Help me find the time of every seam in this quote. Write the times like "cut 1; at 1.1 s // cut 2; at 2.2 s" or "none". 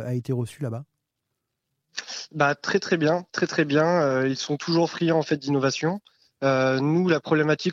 none